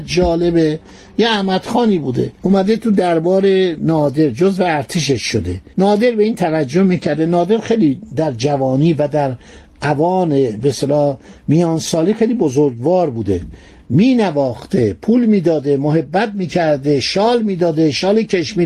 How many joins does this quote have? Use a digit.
2